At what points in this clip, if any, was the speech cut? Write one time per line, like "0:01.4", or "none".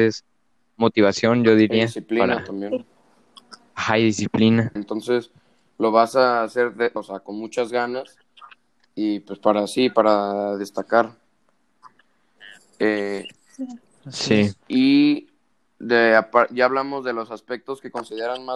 0:04.8
0:07.0